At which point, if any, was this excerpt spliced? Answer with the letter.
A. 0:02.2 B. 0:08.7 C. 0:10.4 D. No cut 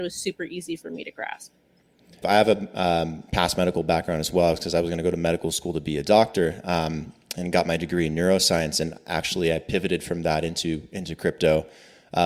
A